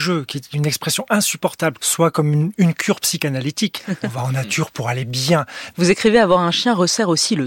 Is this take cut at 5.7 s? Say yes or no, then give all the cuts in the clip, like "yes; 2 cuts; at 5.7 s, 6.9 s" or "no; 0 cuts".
yes; 2 cuts; at 1.8 s, 5.7 s